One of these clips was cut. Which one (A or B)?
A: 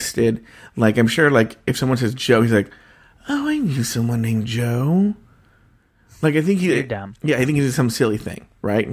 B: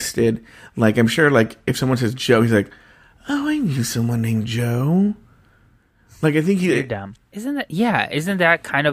B